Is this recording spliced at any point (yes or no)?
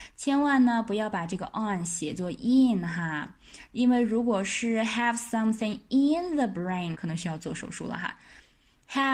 yes